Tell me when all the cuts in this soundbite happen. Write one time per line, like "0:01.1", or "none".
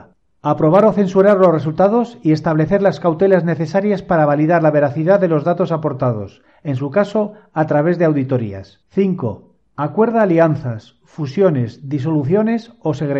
0:08.8